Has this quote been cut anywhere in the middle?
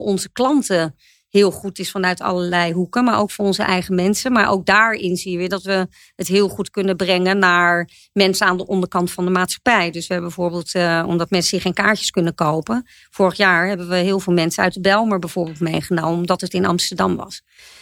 no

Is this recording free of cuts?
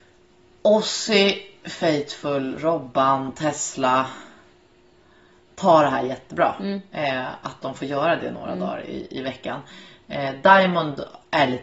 yes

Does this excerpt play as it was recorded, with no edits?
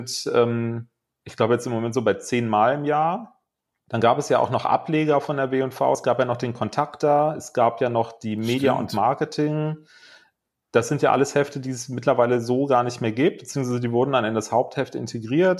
yes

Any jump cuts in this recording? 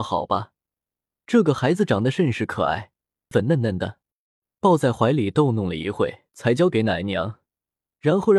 yes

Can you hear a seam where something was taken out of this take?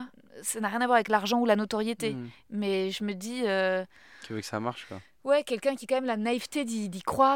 no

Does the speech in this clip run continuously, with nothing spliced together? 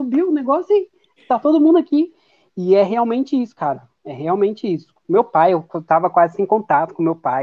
yes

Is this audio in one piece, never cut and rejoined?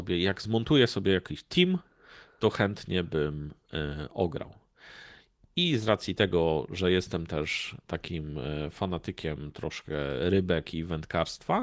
yes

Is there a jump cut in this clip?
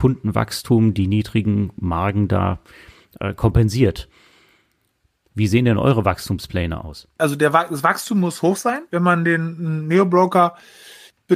no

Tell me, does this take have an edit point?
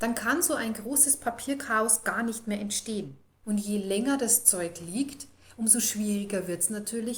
yes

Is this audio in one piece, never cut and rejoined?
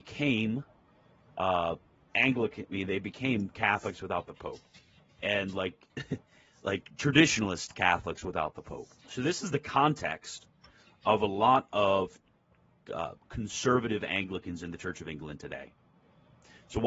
no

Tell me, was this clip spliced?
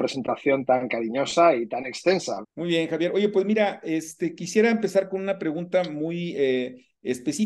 yes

